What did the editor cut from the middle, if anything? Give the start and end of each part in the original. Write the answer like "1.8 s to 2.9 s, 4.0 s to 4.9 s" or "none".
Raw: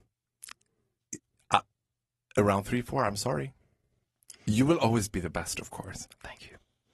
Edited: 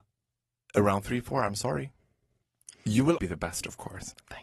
4.8 s to 5.1 s